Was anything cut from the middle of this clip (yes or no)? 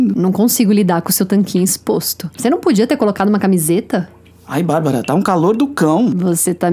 yes